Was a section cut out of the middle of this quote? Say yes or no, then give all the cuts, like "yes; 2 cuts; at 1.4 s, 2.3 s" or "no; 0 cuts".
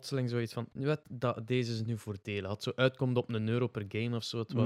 no; 0 cuts